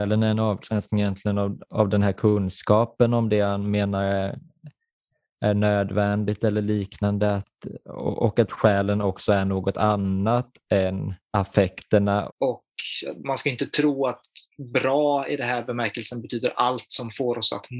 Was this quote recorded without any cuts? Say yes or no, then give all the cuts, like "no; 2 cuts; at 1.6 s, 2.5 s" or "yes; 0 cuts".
no; 1 cut; at 12.3 s